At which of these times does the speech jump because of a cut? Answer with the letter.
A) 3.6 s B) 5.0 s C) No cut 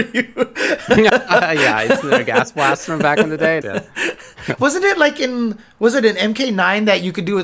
A